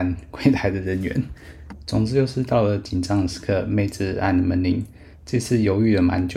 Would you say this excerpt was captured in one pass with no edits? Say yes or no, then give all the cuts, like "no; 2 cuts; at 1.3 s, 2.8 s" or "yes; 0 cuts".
no; 1 cut; at 5.1 s